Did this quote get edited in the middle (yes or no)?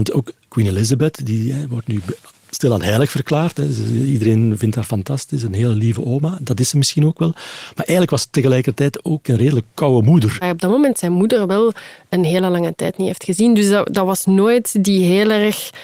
yes